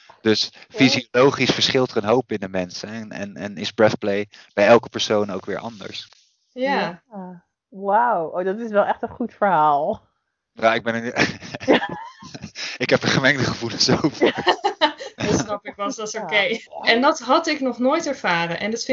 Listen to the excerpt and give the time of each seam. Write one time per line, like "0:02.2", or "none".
0:15.1
0:16.7